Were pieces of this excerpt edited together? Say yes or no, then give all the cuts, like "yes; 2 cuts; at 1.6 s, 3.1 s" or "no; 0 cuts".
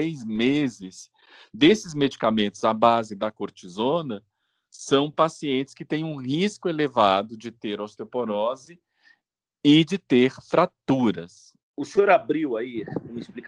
no; 0 cuts